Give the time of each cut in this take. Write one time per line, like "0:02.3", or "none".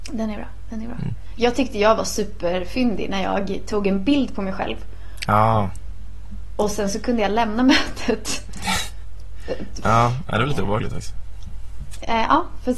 0:09.8

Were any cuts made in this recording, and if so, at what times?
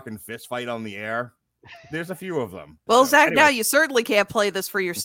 0:02.9

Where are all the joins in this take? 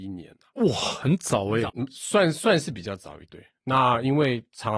0:01.7
0:03.3

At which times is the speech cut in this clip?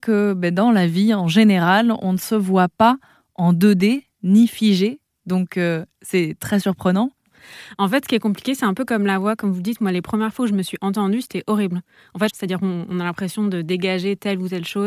0:12.3

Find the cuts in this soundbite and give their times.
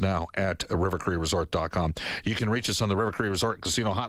0:02.2

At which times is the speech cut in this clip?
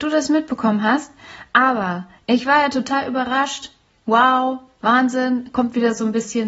none

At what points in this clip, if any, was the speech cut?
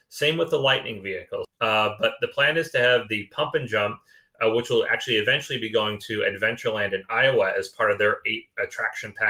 0:01.4

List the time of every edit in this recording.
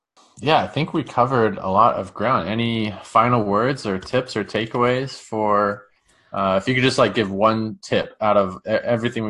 none

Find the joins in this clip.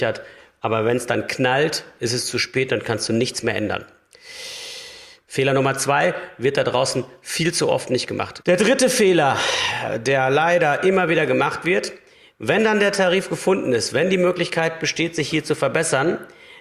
0:05.2
0:08.4

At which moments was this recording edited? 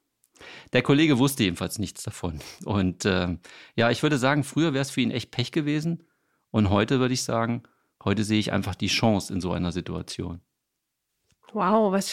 none

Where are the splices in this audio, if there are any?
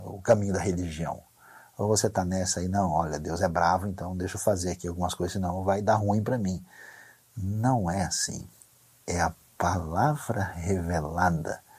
none

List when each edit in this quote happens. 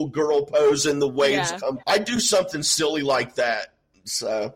0:01.8

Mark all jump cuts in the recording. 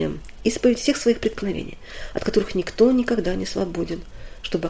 none

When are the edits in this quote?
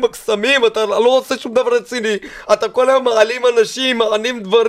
none

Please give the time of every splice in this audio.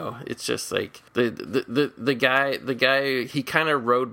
0:01.1

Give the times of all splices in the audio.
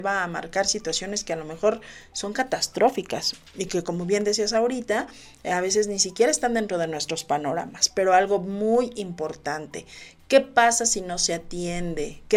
none

